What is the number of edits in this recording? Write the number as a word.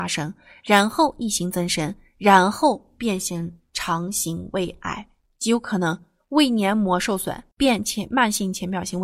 two